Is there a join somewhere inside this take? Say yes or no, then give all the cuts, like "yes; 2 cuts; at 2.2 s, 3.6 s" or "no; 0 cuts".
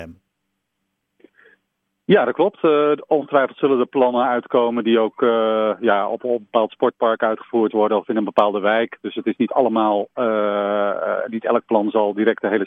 no; 0 cuts